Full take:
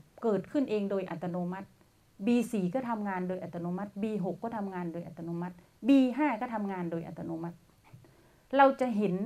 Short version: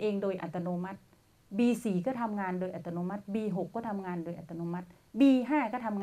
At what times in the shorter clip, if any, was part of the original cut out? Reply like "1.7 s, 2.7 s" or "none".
none